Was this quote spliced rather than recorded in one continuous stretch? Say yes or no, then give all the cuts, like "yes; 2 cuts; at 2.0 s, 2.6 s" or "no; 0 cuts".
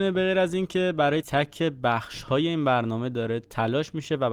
yes; 1 cut; at 1.2 s